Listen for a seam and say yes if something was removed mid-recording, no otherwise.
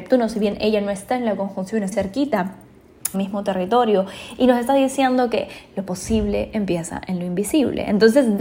yes